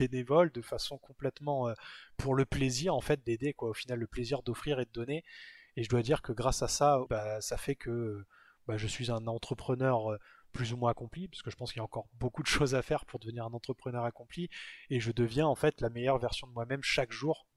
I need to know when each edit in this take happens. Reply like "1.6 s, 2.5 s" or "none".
7.1 s